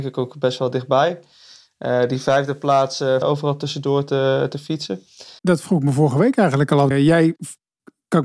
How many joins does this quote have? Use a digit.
3